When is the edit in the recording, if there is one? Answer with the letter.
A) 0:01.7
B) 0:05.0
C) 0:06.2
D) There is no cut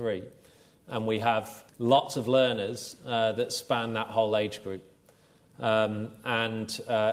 A